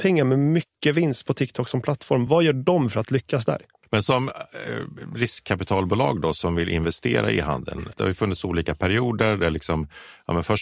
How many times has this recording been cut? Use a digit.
0